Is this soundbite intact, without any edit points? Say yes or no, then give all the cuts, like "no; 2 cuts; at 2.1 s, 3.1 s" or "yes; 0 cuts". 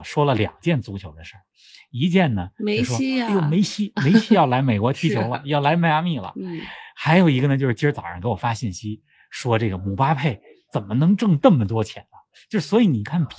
yes; 0 cuts